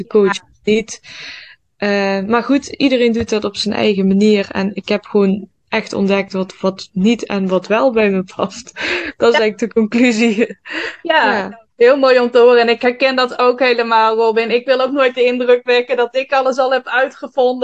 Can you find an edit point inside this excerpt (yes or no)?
no